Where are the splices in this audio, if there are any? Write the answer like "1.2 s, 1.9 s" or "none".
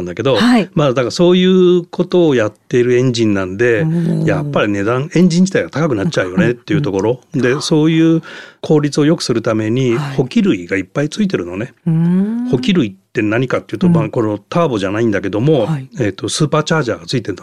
none